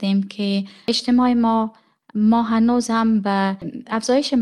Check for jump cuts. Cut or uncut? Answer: uncut